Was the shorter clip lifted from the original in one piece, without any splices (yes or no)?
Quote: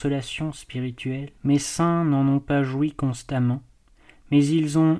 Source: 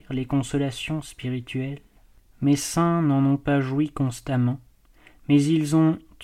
no